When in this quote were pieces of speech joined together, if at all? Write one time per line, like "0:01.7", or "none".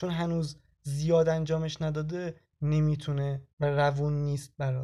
0:03.5